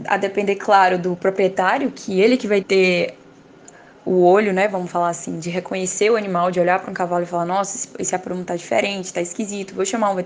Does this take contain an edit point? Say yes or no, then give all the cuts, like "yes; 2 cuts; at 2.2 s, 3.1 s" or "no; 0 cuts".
yes; 1 cut; at 2.6 s